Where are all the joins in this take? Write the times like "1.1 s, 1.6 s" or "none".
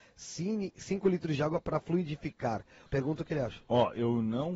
2.9 s